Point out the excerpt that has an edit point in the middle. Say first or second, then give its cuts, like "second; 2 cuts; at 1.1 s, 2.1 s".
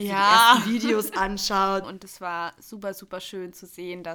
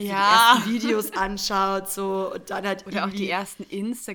first; 1 cut; at 1.8 s